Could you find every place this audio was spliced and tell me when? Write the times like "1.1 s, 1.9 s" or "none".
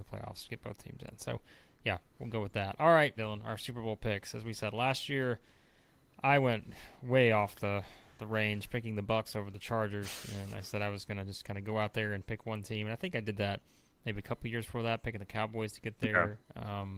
3.2 s